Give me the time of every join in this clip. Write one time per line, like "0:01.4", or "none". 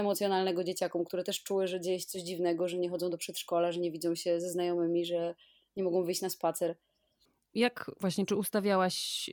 none